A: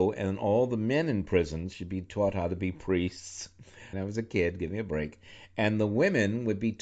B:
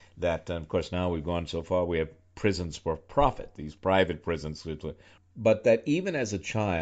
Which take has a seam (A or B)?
A